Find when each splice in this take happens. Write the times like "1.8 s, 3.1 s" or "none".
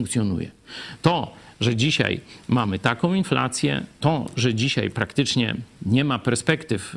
none